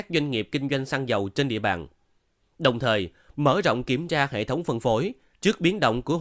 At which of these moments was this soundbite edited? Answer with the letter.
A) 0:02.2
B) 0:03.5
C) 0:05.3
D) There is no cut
C